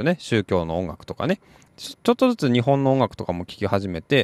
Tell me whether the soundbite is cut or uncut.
cut